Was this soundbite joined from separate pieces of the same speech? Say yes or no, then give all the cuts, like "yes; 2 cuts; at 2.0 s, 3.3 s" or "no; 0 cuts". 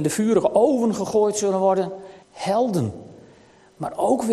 yes; 1 cut; at 2.2 s